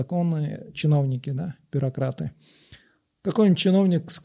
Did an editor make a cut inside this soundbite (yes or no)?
no